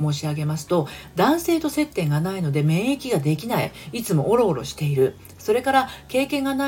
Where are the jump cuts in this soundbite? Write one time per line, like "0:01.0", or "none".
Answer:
none